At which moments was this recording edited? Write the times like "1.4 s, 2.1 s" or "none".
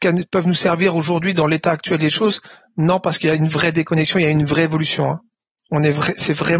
none